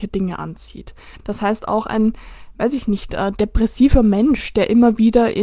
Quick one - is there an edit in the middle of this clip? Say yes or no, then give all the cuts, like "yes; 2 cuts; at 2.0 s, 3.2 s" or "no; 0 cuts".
no; 0 cuts